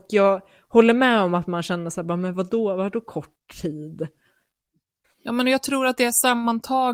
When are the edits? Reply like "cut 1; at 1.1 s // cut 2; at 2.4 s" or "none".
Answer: cut 1; at 5.0 s

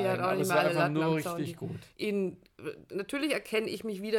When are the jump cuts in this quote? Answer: cut 1; at 1.9 s

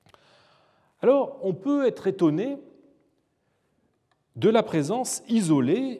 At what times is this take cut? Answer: none

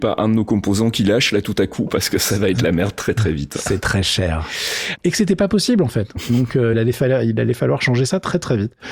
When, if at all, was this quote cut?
cut 1; at 5.0 s // cut 2; at 6.7 s

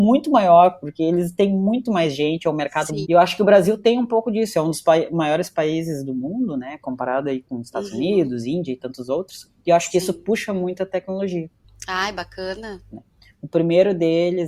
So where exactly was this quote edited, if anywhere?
cut 1; at 3.0 s // cut 2; at 12.9 s

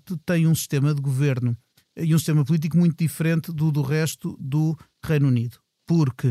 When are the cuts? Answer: none

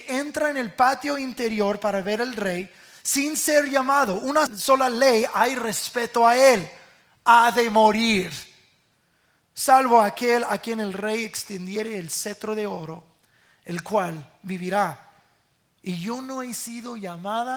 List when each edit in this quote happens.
cut 1; at 4.5 s

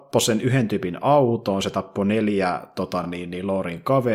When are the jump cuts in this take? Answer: none

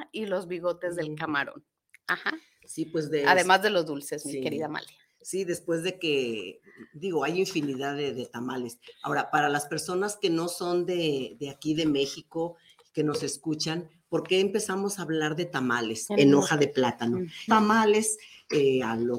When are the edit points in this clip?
cut 1; at 16.1 s // cut 2; at 17.5 s

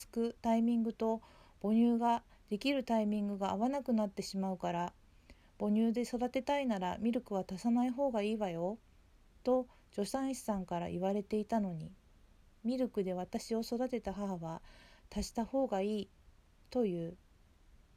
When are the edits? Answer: none

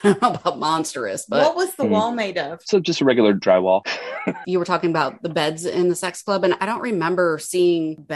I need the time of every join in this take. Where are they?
none

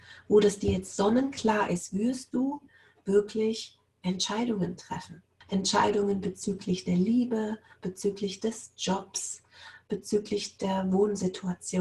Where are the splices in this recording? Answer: cut 1; at 5.4 s

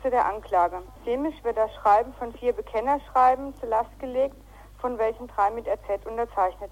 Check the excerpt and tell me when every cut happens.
cut 1; at 1.0 s

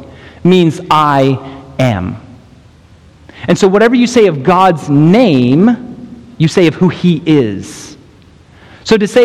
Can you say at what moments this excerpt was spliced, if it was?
none

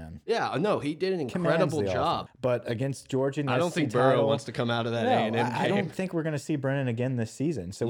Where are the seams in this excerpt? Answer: cut 1; at 2.3 s

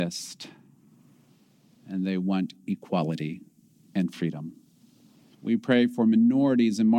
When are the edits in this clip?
cut 1; at 5.3 s

